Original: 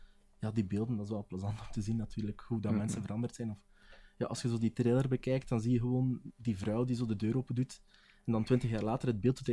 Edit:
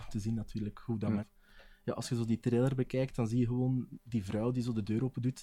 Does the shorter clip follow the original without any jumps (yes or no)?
no